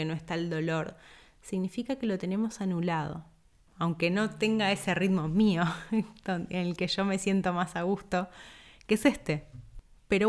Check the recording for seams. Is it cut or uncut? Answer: cut